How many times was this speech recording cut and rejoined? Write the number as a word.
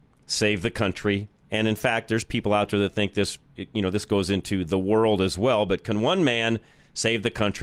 zero